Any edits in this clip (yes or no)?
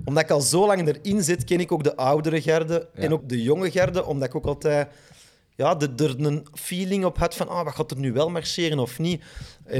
yes